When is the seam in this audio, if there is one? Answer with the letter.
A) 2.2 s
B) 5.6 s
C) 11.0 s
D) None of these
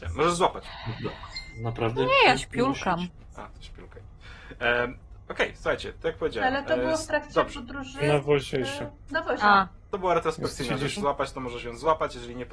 C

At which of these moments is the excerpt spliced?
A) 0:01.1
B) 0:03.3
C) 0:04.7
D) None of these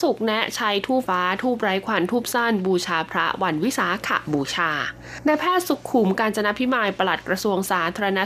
A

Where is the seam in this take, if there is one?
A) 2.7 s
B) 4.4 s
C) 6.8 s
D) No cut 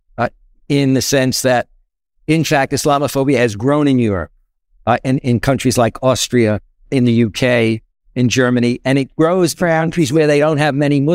C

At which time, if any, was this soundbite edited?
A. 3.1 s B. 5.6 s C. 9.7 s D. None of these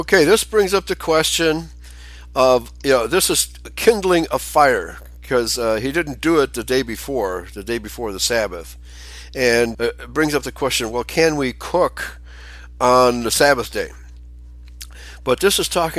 C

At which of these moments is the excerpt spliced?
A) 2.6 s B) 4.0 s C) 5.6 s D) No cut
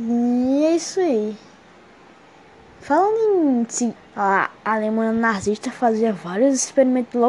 B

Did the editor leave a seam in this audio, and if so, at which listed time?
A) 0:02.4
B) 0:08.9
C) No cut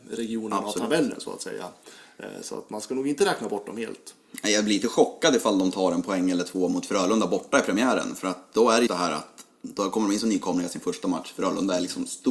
B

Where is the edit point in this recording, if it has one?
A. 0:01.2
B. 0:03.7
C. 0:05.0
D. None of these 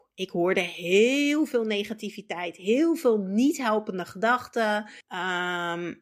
C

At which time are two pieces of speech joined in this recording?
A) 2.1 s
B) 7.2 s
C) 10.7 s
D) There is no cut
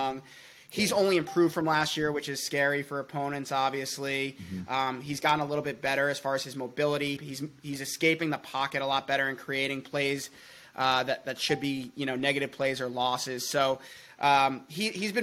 B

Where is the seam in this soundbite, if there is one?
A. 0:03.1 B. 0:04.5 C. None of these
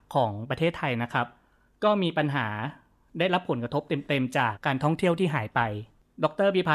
B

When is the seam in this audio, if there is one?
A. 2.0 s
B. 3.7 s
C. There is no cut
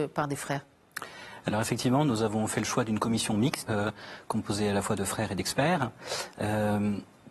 B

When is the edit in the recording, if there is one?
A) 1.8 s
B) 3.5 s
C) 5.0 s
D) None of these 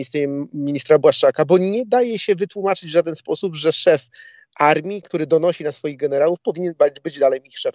C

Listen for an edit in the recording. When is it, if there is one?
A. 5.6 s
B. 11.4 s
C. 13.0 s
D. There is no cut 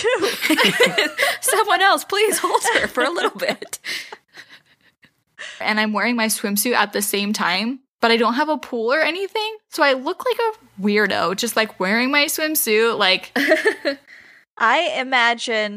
A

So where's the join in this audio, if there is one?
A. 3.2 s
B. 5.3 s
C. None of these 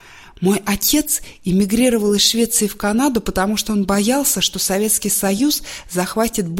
C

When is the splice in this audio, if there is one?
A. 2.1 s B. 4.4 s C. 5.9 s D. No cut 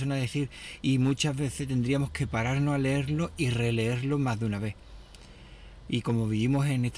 D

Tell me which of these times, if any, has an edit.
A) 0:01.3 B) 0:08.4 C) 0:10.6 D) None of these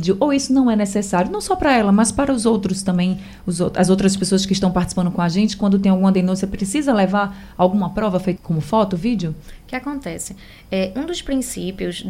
B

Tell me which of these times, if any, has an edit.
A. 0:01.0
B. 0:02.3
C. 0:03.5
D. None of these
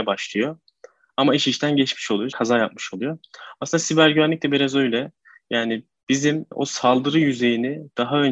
B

